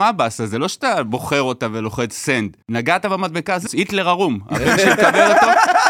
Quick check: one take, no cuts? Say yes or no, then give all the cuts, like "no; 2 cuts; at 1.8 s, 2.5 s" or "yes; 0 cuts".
no; 2 cuts; at 2.6 s, 3.7 s